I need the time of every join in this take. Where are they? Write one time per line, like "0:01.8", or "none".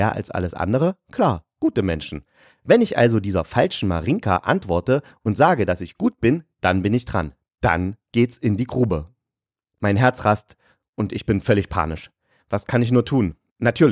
none